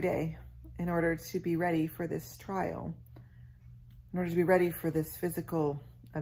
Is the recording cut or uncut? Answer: uncut